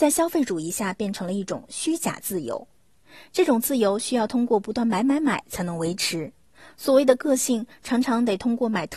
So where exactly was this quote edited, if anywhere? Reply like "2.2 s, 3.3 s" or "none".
none